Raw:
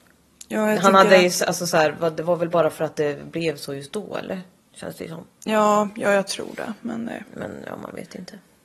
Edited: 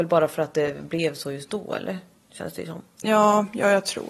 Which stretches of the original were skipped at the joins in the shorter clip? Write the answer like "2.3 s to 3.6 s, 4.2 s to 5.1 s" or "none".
none

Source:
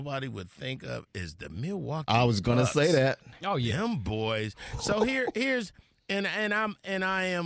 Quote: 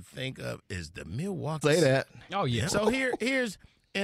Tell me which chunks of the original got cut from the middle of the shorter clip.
2.1 s to 2.7 s, 3.8 s to 4.8 s

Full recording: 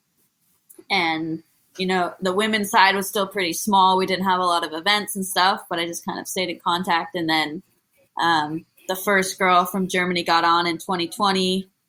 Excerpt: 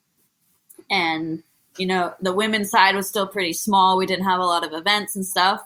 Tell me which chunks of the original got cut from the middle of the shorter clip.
none

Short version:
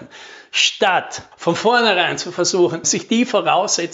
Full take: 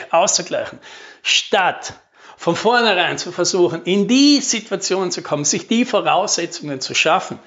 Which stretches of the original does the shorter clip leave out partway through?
2.0 s to 2.3 s, 3.8 s to 5.4 s

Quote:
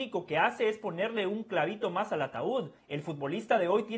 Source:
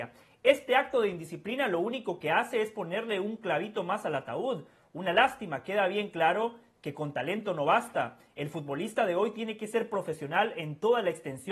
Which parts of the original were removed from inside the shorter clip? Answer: 4.7 s to 8.3 s

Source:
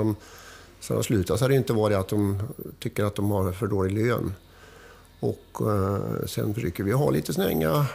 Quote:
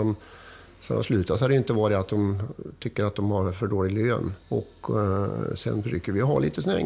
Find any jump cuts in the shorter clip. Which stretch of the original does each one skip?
4.4 s to 5.1 s

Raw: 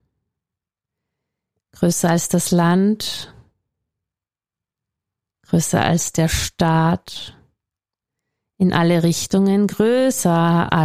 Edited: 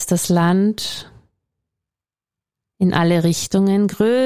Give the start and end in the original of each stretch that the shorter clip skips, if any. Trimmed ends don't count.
4.9 s to 8.5 s

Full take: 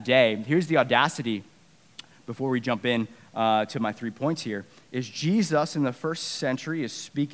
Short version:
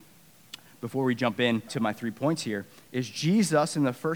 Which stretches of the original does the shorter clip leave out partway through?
3.1 s to 3.7 s

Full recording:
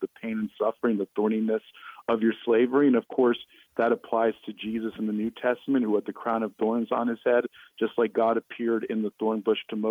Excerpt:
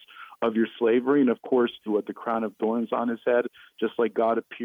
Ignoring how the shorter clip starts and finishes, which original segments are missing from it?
3.5 s to 5.8 s

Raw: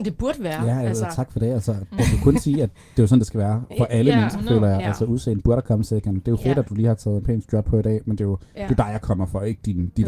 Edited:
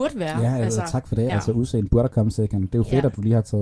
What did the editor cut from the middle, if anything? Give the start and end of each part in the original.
1.5 s to 4.8 s

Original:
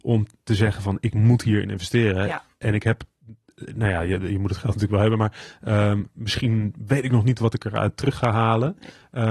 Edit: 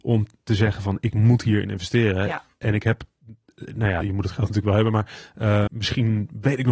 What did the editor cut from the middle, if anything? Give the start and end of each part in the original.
4.0 s to 4.3 s, 5.9 s to 6.1 s

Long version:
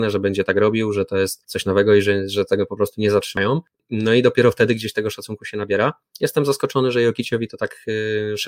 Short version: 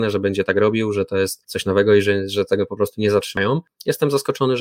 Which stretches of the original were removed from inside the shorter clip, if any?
3.7 s to 6.0 s

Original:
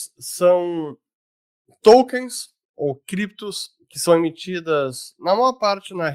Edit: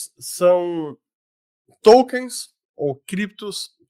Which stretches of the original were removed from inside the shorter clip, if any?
none

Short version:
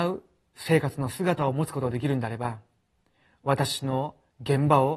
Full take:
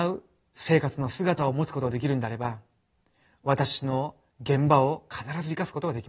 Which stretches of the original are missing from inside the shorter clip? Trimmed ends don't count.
none

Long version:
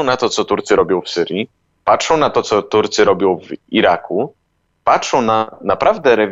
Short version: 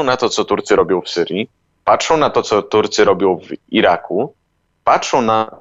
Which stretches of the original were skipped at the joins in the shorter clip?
none

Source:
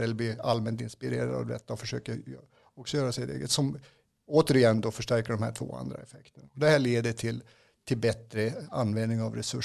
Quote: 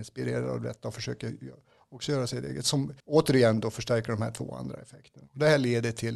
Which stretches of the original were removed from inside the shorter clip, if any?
3.9 s to 4.2 s

